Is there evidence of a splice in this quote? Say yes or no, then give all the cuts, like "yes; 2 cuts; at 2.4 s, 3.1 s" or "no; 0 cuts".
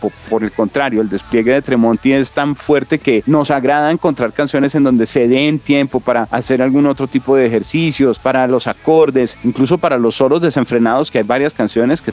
no; 0 cuts